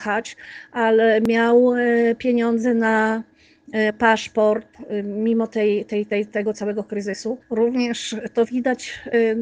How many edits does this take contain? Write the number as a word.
one